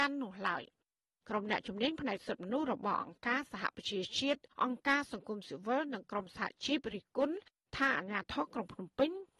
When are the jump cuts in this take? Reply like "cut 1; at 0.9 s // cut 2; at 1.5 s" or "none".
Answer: cut 1; at 4.5 s